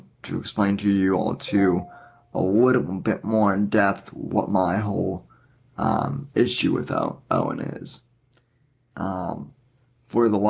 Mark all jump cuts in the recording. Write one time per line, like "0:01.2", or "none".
0:08.9